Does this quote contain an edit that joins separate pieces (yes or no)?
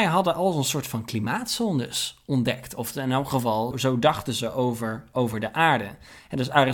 yes